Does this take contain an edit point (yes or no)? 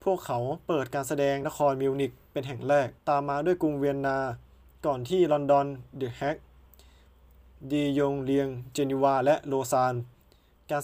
yes